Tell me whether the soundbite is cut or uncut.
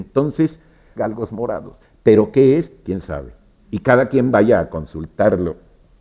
cut